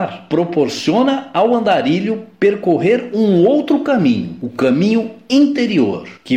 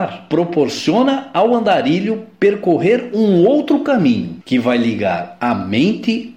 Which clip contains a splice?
second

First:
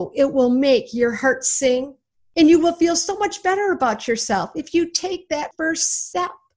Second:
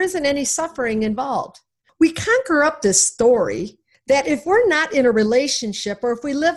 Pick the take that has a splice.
second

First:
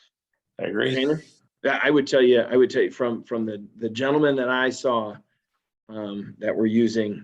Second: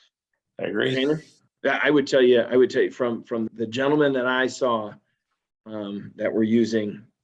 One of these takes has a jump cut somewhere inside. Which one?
second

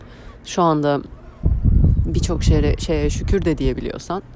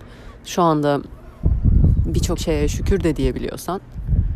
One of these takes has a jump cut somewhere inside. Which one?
second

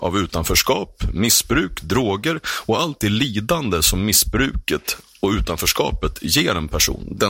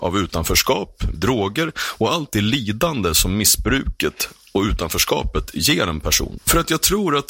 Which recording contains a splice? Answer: second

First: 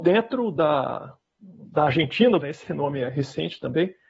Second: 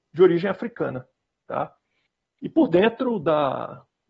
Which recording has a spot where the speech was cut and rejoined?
first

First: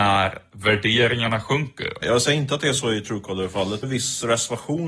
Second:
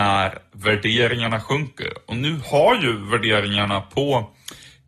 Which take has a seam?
first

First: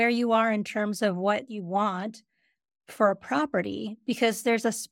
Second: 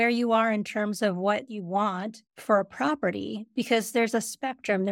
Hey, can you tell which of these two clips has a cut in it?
second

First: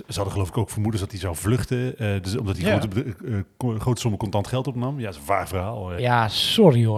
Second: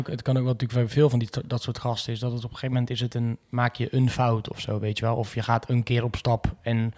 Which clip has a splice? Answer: first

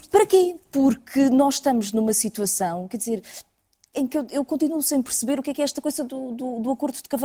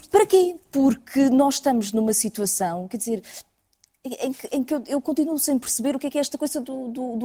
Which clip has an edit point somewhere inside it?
first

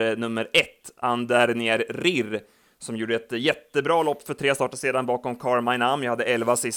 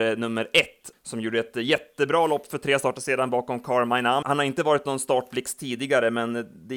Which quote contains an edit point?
second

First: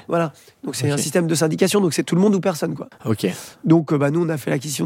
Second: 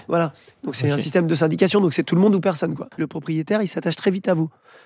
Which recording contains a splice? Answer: second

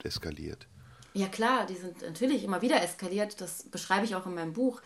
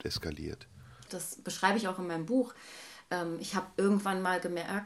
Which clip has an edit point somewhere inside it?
second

